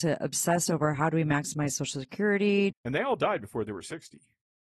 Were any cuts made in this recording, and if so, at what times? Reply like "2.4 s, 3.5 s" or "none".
2.7 s